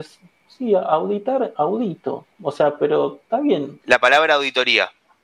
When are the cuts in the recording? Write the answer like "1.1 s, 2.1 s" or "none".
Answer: 3.8 s